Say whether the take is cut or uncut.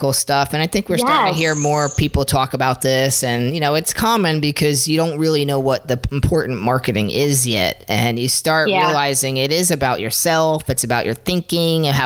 uncut